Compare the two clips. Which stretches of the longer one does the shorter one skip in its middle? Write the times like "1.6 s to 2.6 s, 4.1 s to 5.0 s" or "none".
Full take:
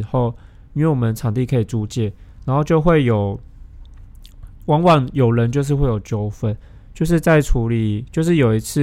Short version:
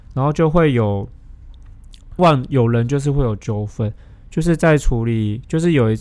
4.5 s to 4.8 s

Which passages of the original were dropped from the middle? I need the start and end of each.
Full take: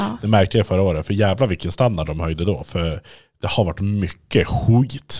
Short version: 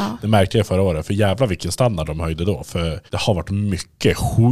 3.1 s to 3.4 s

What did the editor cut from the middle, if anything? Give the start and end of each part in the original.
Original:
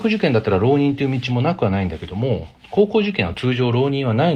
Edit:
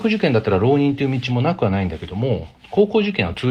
none

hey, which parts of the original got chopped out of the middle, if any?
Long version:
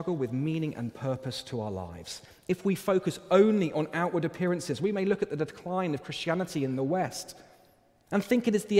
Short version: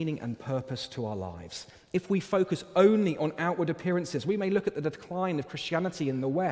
none

